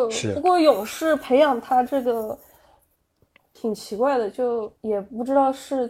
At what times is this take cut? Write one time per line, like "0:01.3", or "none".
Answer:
0:04.8